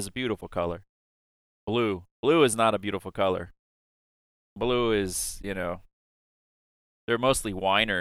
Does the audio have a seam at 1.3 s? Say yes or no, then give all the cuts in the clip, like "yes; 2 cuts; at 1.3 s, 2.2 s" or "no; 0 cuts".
no; 0 cuts